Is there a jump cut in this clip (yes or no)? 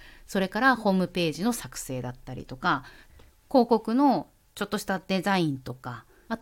no